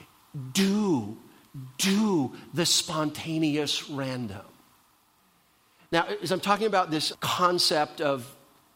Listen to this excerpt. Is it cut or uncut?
cut